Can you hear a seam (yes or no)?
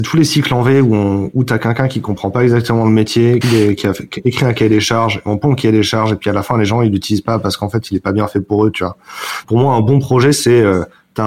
yes